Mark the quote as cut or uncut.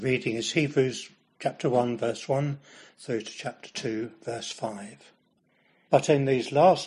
cut